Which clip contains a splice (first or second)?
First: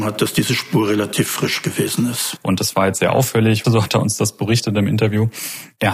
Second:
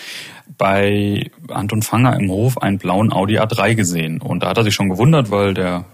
first